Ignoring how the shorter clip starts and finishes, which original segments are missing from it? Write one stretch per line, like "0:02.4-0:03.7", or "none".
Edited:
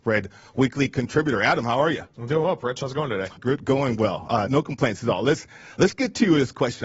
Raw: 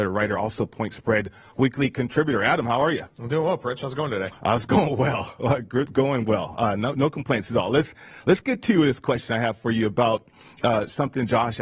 0:04.4-0:05.7
0:06.8-0:07.0